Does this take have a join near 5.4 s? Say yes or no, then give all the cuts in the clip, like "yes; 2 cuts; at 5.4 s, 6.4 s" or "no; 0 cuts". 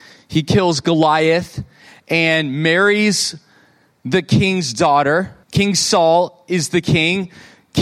yes; 1 cut; at 5.4 s